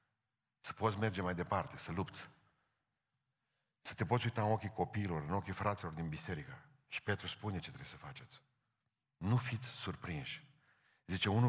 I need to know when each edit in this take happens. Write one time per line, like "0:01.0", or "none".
0:09.0